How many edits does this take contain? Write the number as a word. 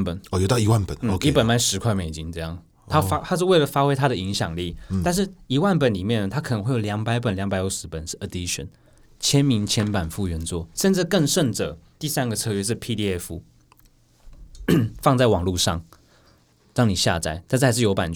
one